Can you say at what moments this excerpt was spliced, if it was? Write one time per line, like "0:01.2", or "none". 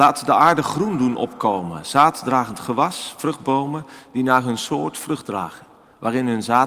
none